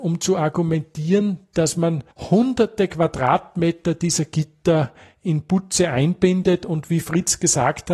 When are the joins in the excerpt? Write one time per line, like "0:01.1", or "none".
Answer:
0:02.1